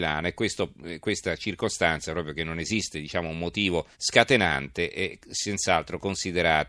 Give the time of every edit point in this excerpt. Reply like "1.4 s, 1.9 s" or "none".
3.9 s